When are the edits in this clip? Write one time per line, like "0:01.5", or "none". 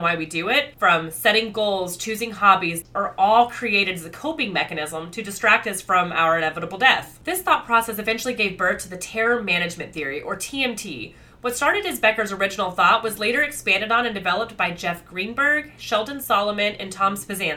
0:02.8